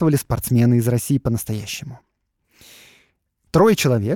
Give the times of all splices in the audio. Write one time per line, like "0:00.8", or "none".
none